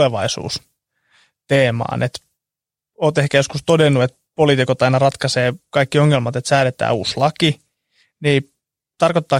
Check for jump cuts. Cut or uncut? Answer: uncut